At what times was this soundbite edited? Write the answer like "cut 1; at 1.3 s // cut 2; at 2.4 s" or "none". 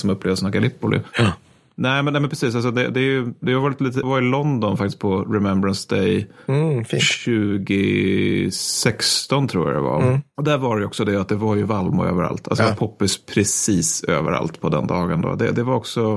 cut 1; at 4.0 s